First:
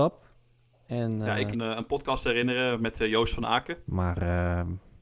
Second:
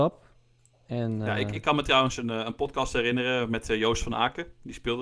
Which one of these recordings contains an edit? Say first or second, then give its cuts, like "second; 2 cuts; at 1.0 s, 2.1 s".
first; 2 cuts; at 1.5 s, 3.9 s